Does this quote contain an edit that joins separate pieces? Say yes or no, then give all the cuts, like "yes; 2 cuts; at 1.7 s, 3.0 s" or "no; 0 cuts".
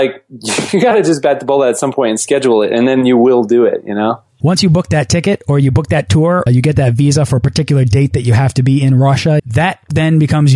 yes; 2 cuts; at 6.5 s, 9.4 s